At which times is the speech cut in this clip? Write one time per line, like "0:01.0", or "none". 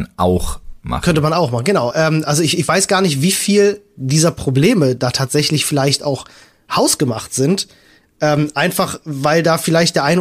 none